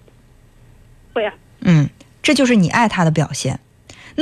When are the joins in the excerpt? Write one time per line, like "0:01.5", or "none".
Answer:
none